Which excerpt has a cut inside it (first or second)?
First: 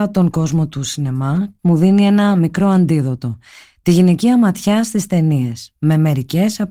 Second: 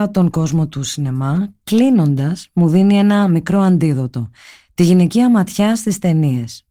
first